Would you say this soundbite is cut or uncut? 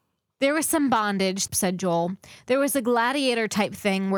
cut